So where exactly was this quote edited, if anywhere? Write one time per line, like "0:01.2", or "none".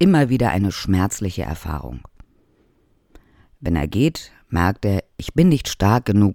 none